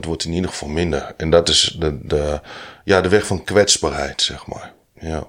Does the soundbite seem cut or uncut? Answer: uncut